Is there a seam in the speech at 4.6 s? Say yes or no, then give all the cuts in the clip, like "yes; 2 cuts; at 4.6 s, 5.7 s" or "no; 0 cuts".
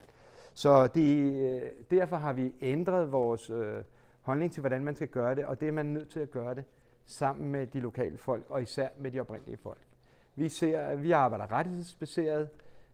no; 0 cuts